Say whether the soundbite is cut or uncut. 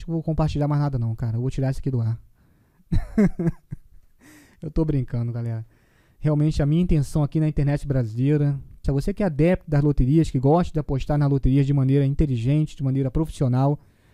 cut